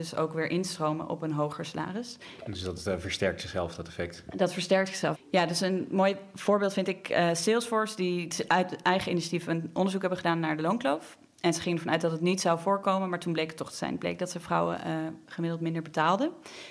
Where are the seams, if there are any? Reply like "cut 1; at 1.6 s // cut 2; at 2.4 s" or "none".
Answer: none